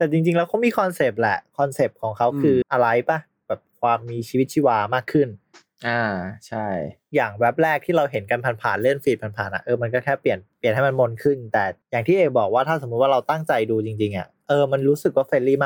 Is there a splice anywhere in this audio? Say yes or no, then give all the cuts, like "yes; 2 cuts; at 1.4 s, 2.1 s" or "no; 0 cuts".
yes; 2 cuts; at 2.6 s, 11.8 s